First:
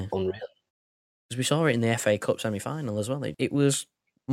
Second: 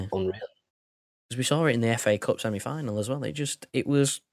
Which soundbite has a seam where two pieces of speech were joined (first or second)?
first